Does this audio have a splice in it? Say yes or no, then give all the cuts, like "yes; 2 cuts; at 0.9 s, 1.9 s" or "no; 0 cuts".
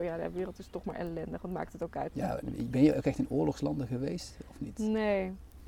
yes; 1 cut; at 2.1 s